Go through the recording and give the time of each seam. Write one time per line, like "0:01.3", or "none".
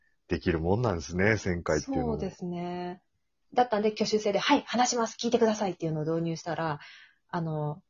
0:03.4